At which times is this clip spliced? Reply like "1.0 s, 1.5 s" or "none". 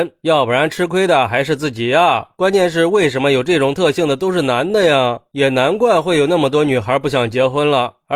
none